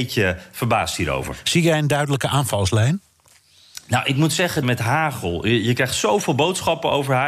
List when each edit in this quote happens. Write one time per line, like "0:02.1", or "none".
0:04.6